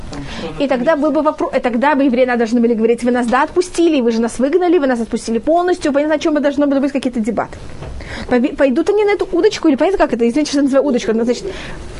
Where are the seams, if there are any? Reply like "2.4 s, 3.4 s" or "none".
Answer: 8.2 s